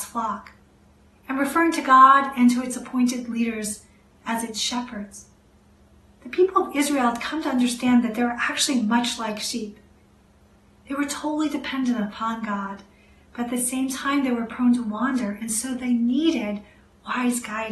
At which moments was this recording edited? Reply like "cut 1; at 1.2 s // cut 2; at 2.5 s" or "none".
none